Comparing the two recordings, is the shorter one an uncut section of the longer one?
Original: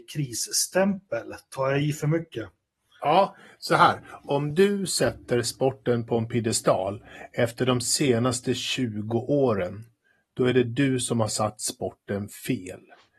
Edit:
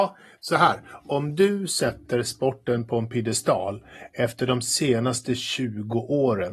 yes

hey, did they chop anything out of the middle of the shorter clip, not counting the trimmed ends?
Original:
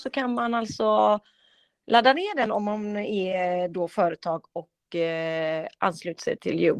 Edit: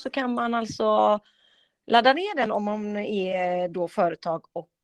no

